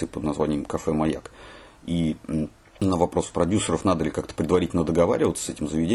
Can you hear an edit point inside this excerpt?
no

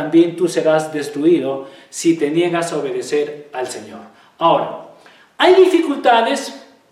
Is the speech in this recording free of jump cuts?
yes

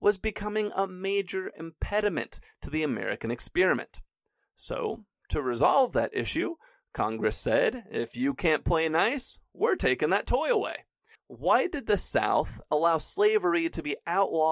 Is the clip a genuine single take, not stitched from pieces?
no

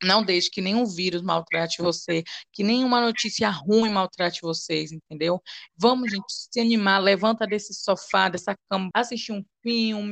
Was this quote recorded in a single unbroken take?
no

